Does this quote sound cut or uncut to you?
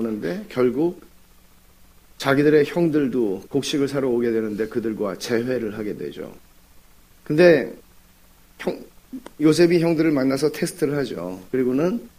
cut